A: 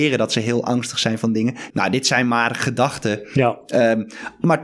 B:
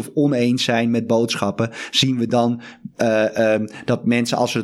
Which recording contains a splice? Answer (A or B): A